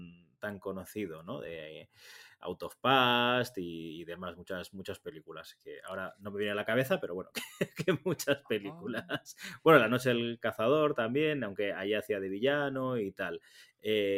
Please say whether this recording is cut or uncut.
uncut